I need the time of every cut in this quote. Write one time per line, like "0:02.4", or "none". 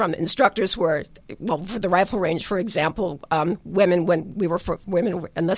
none